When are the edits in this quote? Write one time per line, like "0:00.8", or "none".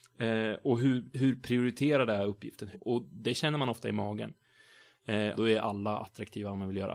0:02.7
0:05.3